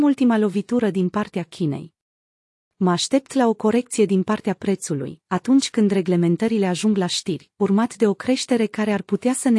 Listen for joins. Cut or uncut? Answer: uncut